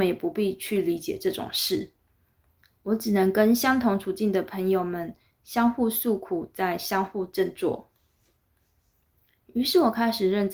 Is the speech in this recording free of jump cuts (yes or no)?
yes